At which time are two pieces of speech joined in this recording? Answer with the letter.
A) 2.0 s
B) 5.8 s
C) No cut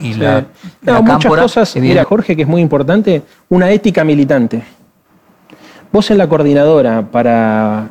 A